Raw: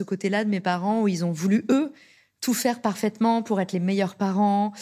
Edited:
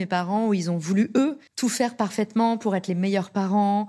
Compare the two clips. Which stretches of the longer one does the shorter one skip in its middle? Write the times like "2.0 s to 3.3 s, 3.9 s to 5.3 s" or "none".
2.0 s to 2.3 s